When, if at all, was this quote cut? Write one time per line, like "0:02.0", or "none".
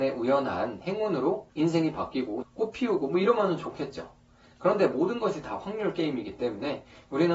0:02.4